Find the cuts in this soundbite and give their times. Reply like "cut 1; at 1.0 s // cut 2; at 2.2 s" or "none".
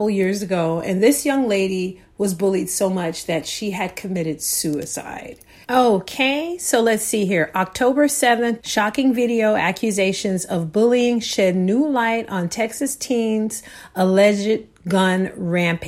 cut 1; at 5.6 s // cut 2; at 8.6 s

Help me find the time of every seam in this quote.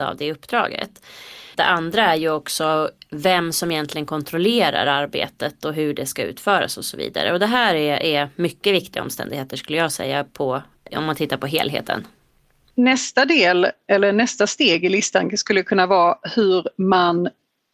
cut 1; at 1.5 s // cut 2; at 10.9 s

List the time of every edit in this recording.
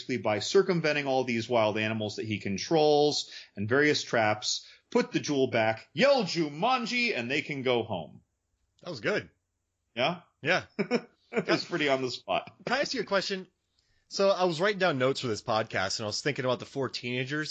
none

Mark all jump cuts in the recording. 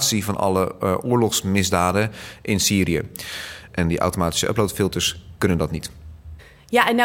cut 1; at 3.7 s

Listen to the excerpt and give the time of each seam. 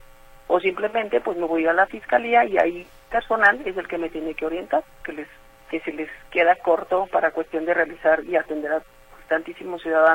cut 1; at 5.0 s

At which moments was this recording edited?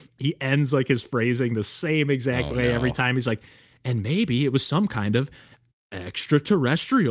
none

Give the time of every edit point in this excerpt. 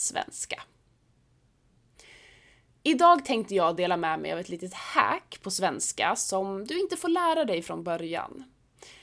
none

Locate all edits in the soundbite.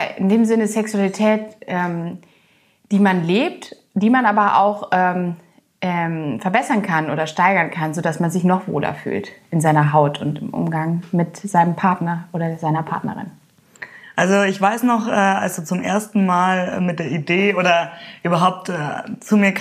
none

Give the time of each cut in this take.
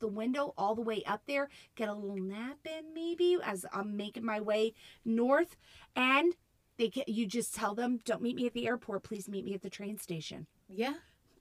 none

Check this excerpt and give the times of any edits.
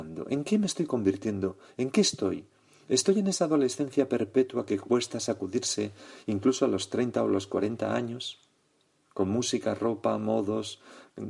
none

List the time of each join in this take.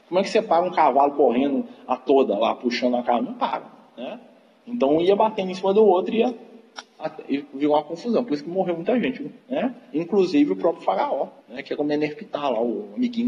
cut 1; at 11.4 s

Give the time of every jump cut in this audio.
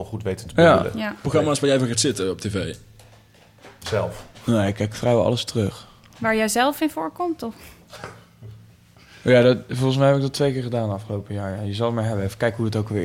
cut 1; at 1.2 s

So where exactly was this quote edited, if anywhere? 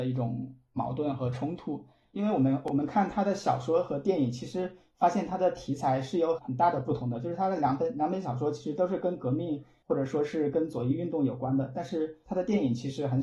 none

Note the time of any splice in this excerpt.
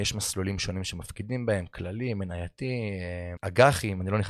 cut 1; at 3.4 s

